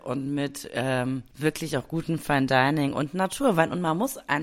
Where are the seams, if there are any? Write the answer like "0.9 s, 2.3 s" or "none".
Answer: 1.3 s